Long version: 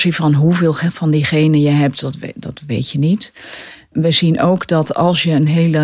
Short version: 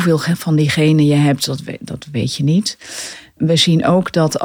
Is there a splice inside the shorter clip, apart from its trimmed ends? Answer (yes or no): no